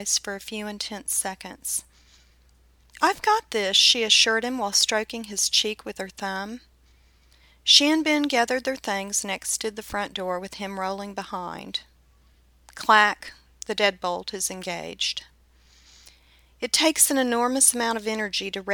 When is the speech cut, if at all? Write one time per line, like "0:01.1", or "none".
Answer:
none